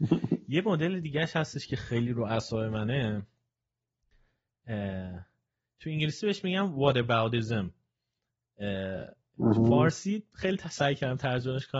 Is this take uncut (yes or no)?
yes